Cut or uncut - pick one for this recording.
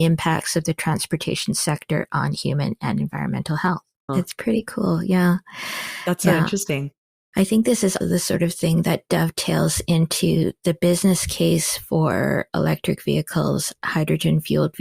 cut